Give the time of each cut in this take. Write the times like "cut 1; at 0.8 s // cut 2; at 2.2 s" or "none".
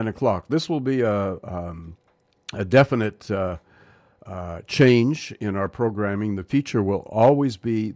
none